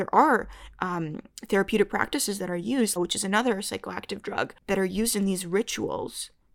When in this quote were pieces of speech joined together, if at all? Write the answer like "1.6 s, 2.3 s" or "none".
3.0 s

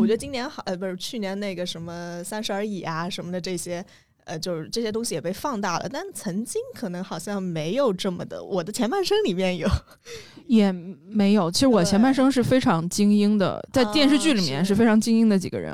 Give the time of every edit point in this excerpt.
none

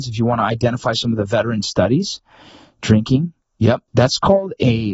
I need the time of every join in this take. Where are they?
3.9 s

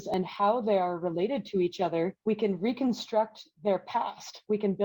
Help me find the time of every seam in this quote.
2.2 s

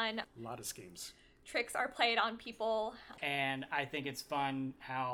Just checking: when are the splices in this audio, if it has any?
3.2 s

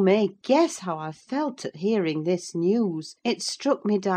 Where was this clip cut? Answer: 3.2 s

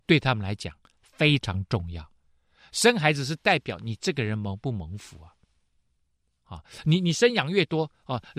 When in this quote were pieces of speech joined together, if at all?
none

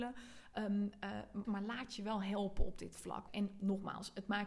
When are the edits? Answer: 1.4 s, 3.3 s

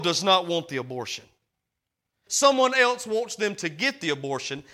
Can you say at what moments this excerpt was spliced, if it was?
2.3 s

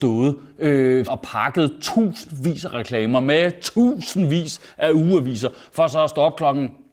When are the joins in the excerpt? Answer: 1.1 s

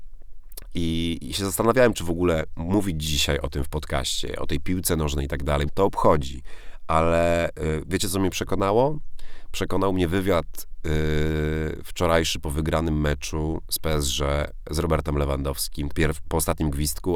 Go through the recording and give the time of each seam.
1.2 s, 5.7 s, 15.9 s

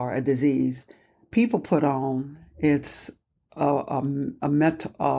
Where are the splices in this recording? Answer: none

